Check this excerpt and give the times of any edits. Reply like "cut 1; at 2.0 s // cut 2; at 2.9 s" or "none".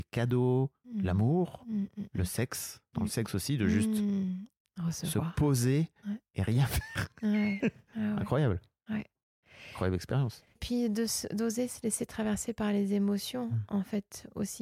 cut 1; at 10.5 s